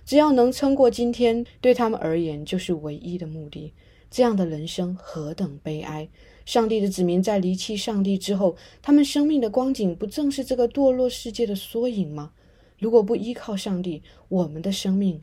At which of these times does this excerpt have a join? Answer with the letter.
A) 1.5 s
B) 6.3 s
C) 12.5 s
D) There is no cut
A